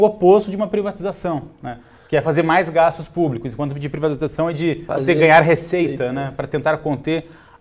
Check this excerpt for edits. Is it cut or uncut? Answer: uncut